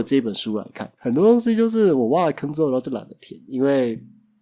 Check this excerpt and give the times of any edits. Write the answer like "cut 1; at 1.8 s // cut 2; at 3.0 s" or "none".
cut 1; at 1.0 s